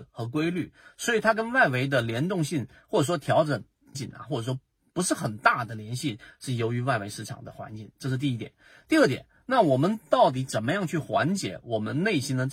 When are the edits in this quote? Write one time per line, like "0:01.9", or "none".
0:03.9